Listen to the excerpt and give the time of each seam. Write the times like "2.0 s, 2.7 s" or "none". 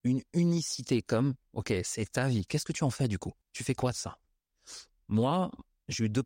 3.4 s